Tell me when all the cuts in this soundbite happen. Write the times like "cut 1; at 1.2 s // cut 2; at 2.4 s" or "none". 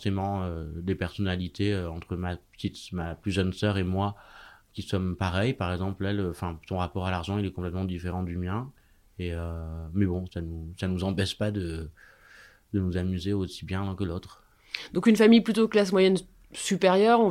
cut 1; at 10.3 s